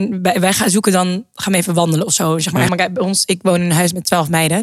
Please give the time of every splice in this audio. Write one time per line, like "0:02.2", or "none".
0:02.7